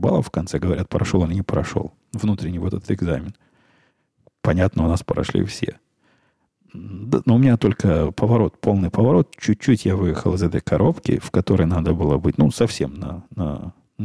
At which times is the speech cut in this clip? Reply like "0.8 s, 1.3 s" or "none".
none